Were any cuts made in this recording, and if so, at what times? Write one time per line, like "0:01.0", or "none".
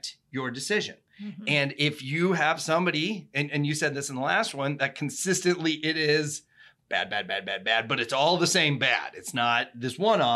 none